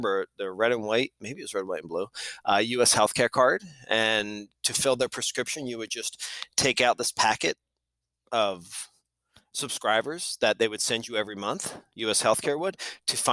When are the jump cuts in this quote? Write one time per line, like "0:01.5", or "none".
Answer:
none